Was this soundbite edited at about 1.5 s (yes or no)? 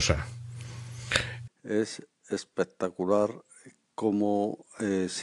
yes